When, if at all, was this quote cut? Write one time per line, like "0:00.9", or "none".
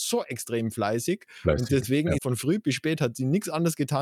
0:02.2

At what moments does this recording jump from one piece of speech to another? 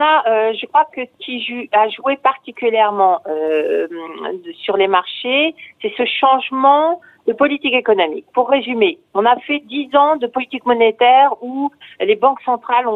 none

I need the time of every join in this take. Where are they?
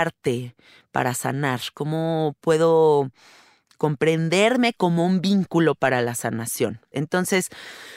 0:06.9

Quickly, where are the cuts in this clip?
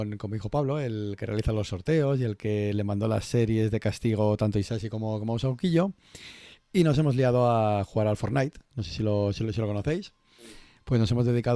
none

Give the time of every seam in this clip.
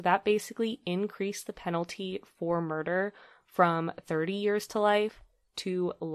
none

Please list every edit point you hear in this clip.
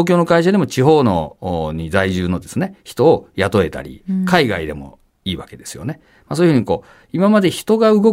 none

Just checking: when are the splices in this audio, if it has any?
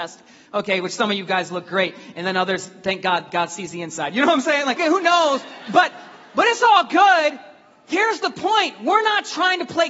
0:04.8

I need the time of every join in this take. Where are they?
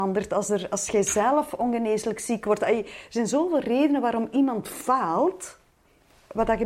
none

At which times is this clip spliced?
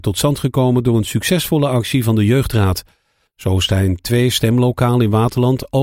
0:03.3

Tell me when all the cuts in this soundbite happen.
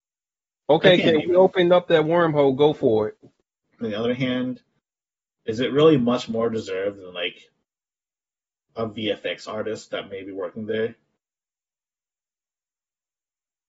0:03.8

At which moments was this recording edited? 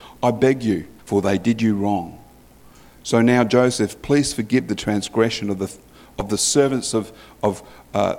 0:01.0

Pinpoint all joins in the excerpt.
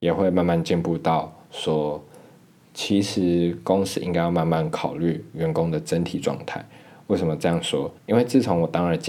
0:08.0

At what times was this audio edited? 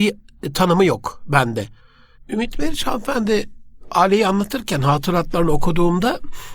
0:02.2

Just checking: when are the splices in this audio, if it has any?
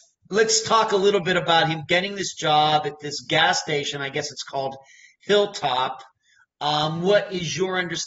none

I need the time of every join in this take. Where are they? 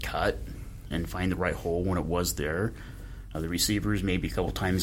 0:00.9
0:03.3

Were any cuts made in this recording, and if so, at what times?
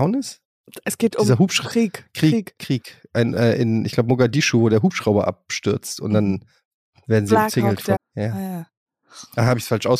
0:08.0

